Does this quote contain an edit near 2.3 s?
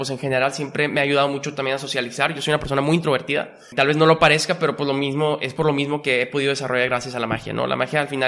no; 0 cuts

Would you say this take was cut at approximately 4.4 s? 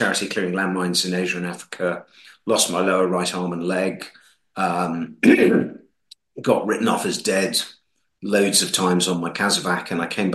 no; 0 cuts

